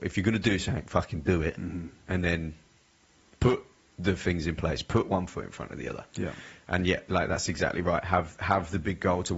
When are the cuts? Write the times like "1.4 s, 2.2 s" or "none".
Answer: none